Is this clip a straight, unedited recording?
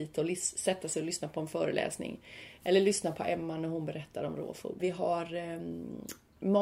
no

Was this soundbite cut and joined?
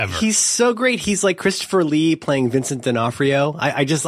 no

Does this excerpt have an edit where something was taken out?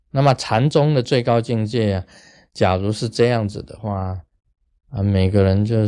no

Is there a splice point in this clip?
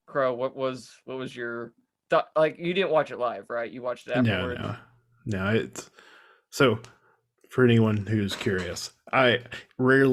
no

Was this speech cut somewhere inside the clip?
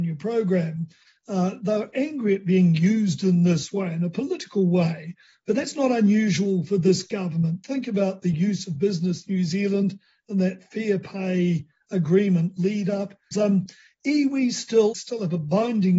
yes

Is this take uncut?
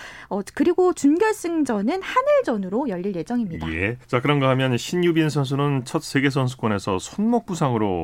no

